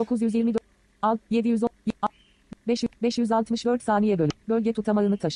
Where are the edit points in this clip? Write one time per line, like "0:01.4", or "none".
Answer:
none